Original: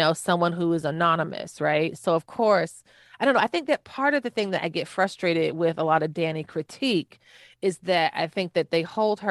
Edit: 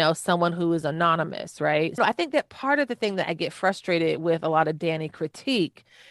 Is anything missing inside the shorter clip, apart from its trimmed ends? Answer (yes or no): yes